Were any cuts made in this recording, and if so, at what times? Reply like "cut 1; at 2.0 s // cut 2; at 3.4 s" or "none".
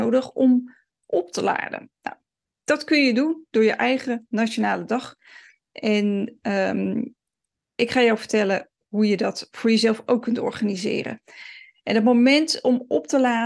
none